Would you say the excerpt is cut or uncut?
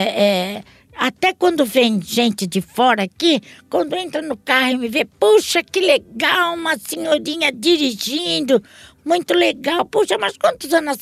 uncut